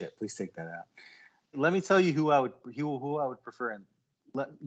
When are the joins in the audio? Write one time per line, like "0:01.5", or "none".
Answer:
0:01.5